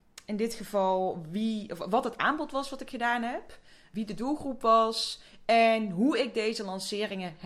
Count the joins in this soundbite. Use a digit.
1